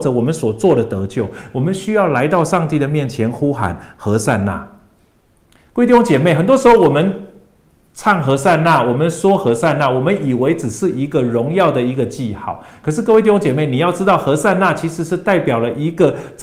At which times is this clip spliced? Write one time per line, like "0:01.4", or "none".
0:05.7